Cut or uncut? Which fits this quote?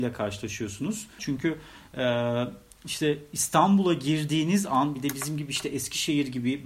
cut